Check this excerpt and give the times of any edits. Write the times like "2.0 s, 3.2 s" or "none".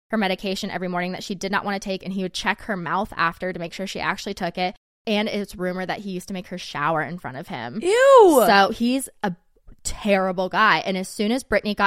none